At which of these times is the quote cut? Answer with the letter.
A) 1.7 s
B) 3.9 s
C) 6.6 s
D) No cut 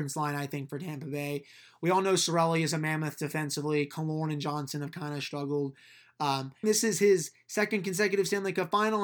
C